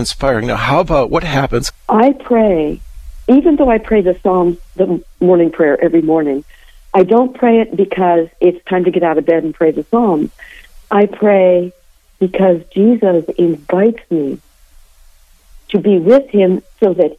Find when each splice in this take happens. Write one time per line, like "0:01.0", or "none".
0:01.7